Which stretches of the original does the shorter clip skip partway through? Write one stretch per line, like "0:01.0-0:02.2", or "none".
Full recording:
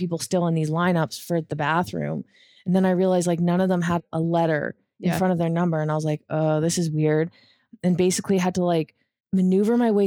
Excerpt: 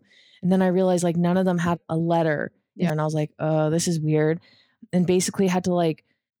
0:05.1-0:05.8